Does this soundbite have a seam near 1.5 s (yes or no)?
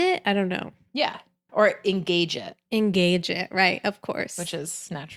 yes